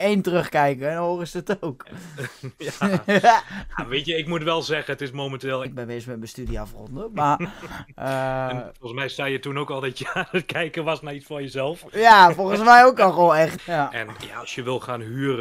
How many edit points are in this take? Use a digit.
2